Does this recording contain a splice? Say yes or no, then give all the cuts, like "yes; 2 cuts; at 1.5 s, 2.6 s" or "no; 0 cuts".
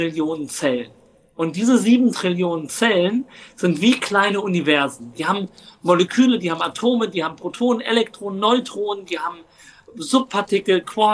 no; 0 cuts